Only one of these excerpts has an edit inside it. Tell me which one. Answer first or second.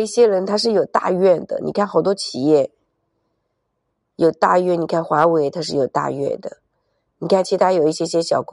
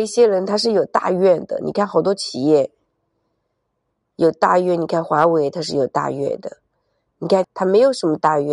second